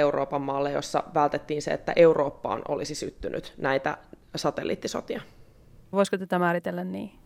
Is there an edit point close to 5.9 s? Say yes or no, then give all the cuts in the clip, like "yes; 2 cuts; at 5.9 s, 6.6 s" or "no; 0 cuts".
yes; 1 cut; at 5.9 s